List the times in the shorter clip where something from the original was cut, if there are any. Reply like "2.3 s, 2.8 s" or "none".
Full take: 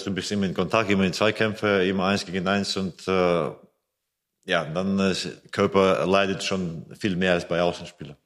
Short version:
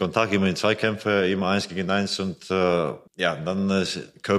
3.1 s